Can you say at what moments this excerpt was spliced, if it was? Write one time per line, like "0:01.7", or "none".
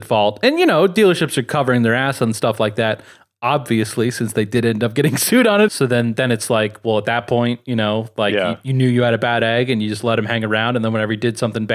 0:05.7

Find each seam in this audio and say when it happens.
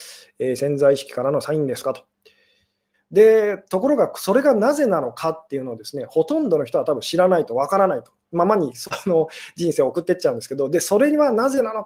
0:02.9

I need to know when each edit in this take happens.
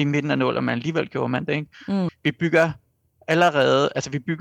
0:02.1

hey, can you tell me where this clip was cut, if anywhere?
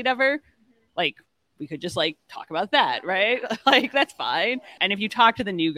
0:04.8

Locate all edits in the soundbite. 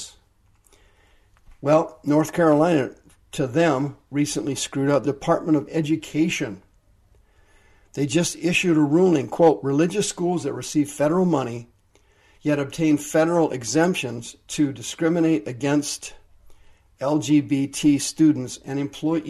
0:05.0

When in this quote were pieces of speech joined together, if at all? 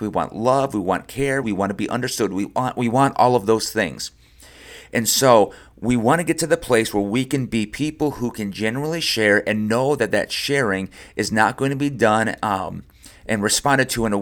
0:01.4

